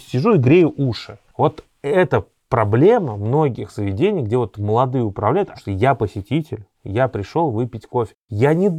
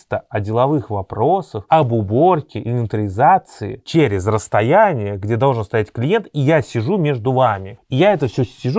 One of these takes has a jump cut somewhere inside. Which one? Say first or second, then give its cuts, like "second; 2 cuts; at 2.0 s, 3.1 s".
first; 2 cuts; at 5.5 s, 6.7 s